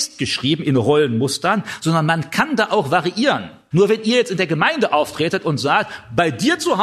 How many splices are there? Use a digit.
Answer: 1